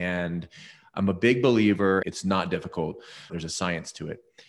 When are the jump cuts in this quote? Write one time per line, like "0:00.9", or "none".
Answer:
0:02.0
0:03.3